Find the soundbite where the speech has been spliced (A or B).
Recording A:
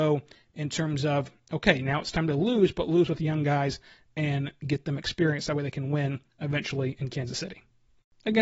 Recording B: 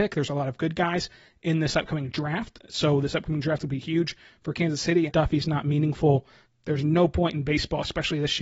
B